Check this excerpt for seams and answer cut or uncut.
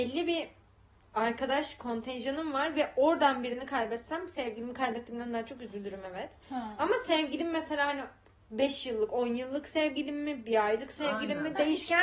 uncut